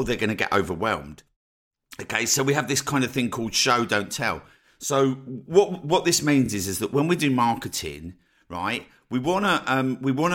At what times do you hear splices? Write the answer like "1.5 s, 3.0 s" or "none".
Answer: none